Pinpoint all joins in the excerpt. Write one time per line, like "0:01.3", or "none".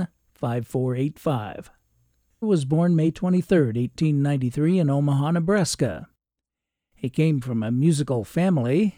0:02.4